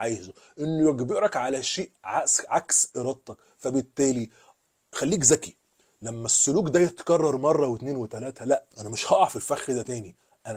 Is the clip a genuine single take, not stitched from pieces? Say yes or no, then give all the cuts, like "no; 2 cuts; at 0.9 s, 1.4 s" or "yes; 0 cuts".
no; 1 cut; at 8.7 s